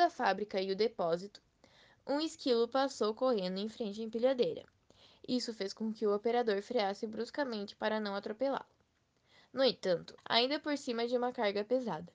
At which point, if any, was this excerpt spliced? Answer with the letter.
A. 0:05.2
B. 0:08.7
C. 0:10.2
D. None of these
C